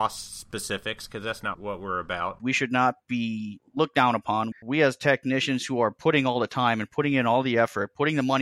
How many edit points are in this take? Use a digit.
2